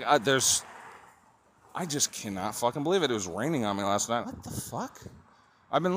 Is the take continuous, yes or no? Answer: no